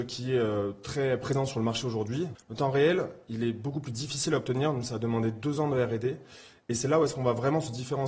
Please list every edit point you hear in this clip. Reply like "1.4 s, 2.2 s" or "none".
2.3 s